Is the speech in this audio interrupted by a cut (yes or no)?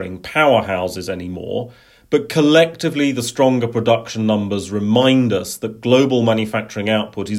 no